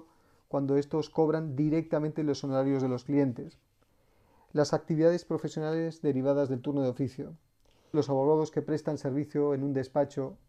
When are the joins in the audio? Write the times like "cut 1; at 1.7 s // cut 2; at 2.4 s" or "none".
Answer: cut 1; at 7.9 s